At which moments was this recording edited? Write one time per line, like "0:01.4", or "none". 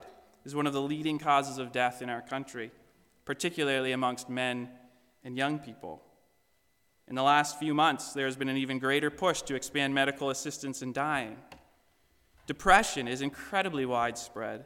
none